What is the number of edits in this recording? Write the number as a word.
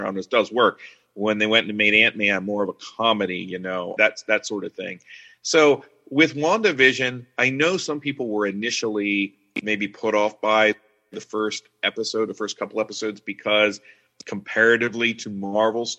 one